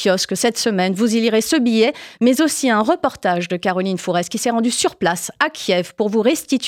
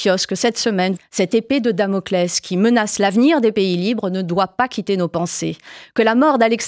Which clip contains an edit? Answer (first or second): second